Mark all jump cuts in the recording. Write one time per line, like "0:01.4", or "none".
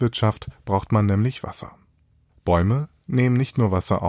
0:02.3

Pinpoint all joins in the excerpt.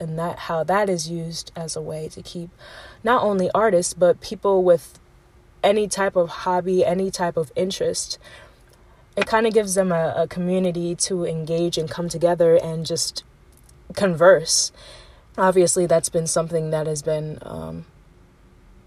0:15.3

